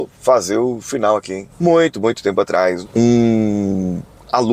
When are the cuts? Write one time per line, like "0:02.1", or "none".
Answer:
0:02.8